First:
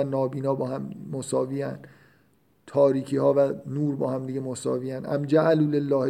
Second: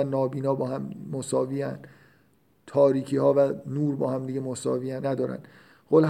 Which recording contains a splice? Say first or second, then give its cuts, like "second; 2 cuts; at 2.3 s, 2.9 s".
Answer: second; 1 cut; at 5.0 s